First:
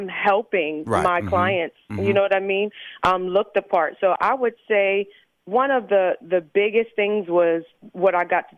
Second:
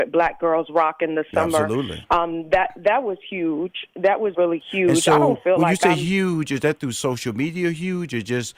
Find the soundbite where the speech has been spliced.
second; 1 cut; at 4.3 s

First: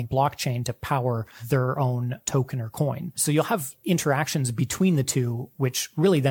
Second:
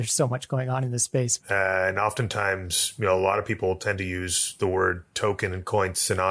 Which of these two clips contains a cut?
second; 1 cut; at 1.4 s

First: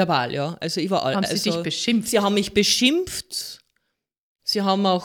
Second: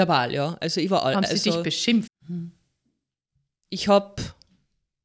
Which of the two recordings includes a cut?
second; 1 cut; at 2.1 s

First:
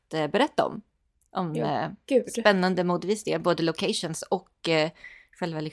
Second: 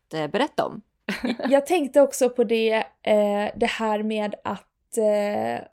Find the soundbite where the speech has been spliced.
second; 1 cut; at 1.0 s

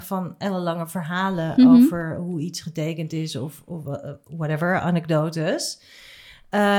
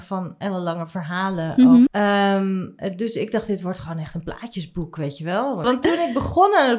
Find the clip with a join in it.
second; 2 cuts; at 1.9 s, 5.6 s

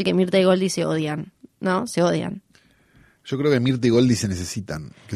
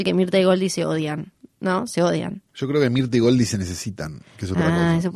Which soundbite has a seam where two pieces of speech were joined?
second; 1 cut; at 2.5 s

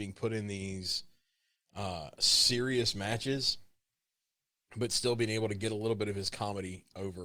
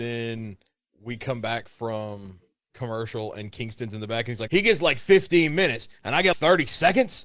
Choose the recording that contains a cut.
second; 2 cuts; at 4.5 s, 6.3 s

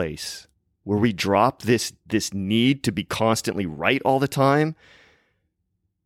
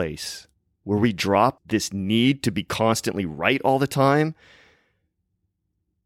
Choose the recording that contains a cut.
second; 1 cut; at 1.6 s

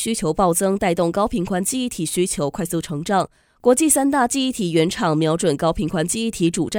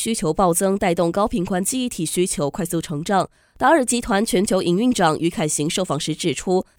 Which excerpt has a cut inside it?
second; 1 cut; at 3.4 s

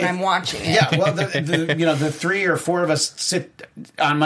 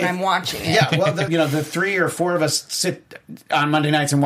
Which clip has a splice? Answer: second; 1 cut; at 1.3 s

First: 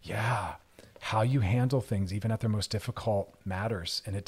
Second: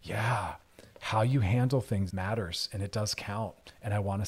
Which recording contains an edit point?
second; 1 cut; at 2.1 s

